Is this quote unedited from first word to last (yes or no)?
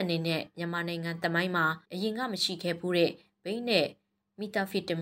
no